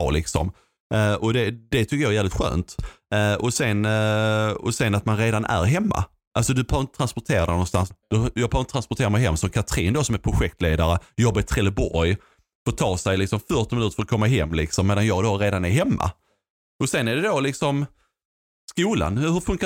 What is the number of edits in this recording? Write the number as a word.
one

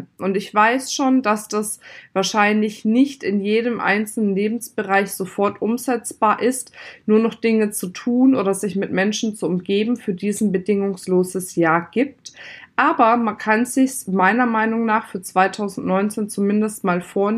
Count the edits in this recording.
zero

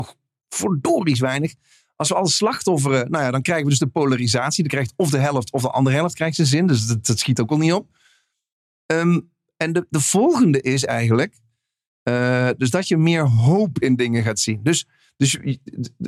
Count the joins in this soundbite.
zero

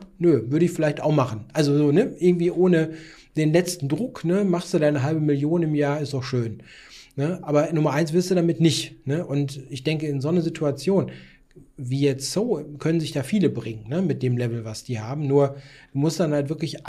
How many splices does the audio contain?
zero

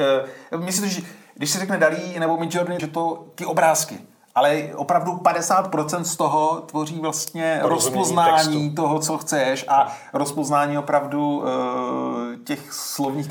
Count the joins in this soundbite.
one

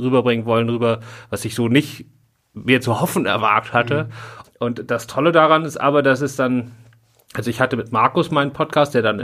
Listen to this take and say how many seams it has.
one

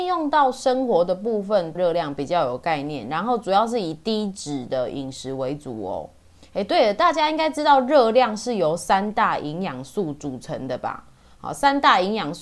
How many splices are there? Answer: one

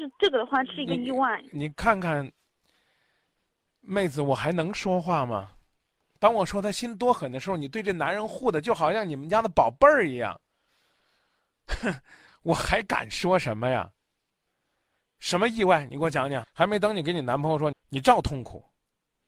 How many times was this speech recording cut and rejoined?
two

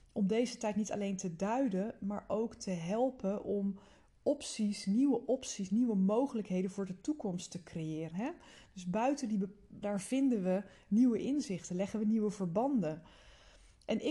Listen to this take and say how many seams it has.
two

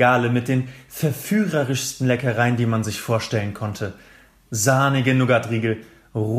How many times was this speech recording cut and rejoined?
zero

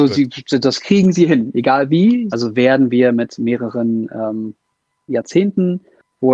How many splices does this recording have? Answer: two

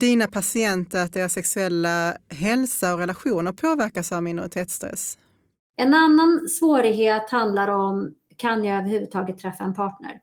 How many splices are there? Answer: one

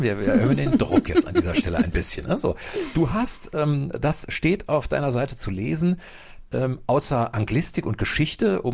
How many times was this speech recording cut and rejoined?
one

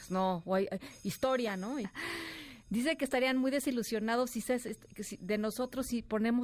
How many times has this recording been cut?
one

